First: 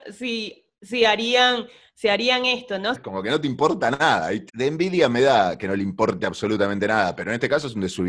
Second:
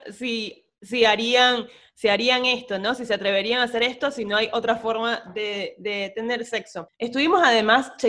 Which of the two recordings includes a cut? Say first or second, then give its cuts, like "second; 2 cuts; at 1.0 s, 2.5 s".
first; 2 cuts; at 2.9 s, 4.5 s